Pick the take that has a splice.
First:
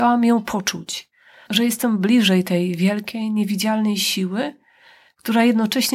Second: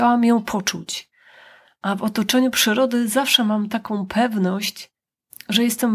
first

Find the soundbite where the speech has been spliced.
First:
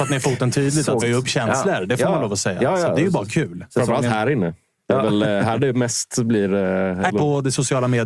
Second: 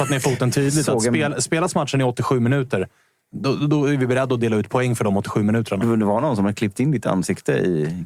first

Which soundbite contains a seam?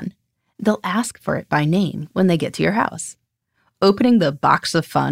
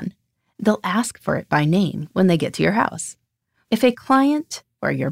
second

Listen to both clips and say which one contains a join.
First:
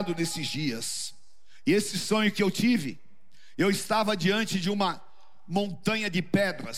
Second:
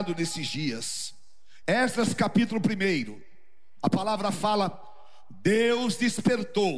second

